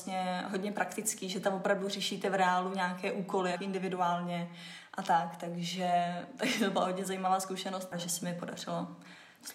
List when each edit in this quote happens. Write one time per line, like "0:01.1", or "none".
0:03.6
0:07.9